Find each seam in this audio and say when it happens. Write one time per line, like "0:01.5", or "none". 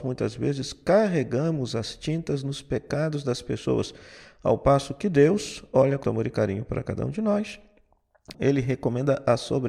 0:06.0
0:08.3